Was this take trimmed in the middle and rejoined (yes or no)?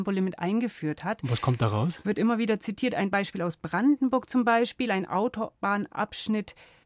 no